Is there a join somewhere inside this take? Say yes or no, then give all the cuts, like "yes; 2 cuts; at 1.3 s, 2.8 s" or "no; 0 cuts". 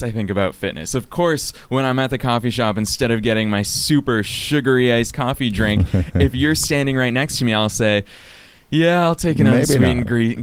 no; 0 cuts